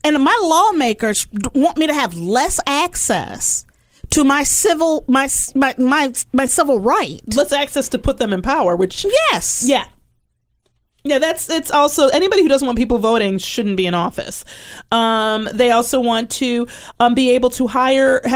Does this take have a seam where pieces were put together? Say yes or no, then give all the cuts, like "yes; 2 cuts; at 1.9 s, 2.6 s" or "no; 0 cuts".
no; 0 cuts